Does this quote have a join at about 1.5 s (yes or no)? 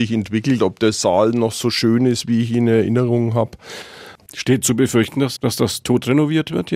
no